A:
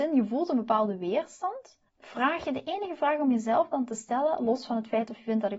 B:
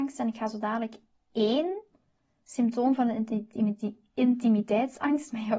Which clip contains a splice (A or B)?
A